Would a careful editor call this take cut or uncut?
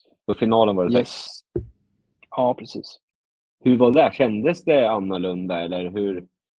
uncut